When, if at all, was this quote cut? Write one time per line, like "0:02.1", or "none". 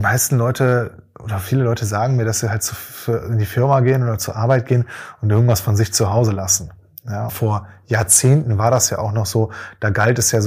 0:07.3